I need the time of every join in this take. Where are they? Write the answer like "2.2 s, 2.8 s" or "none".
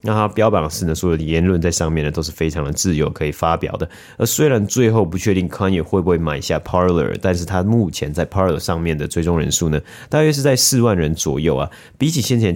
none